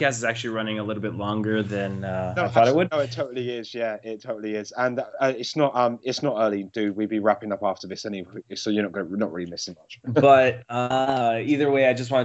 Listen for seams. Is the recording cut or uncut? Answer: uncut